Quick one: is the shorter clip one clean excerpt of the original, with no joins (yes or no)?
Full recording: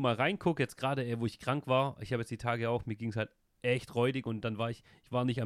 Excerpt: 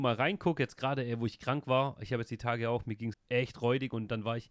no